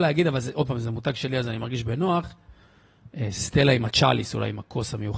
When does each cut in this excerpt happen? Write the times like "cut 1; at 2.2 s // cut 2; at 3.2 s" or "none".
none